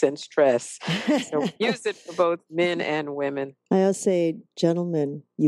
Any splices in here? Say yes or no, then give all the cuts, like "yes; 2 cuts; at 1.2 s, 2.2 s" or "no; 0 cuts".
no; 0 cuts